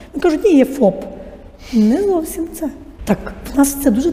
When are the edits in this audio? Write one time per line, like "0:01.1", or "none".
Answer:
0:03.0